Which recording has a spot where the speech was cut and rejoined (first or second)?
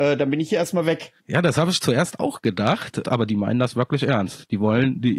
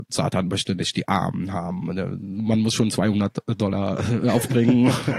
first